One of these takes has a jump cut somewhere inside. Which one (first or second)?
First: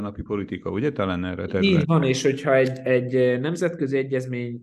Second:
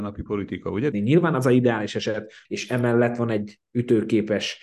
second